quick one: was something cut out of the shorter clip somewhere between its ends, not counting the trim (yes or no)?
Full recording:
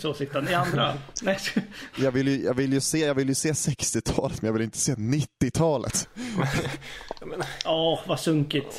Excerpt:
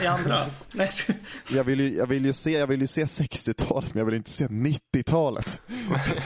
no